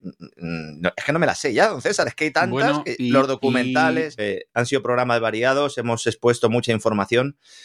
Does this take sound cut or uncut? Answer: cut